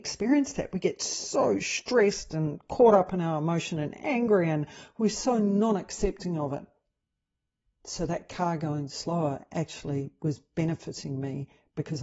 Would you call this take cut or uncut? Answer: cut